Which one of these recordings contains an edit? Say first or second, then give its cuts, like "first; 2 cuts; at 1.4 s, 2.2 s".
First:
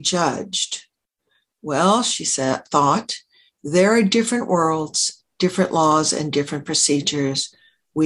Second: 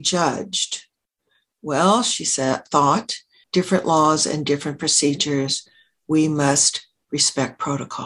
second; 1 cut; at 3.4 s